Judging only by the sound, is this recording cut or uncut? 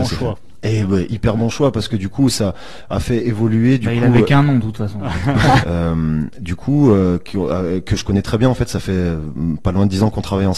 cut